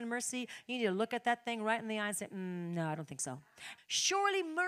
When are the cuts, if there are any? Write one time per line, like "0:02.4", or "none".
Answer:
0:03.8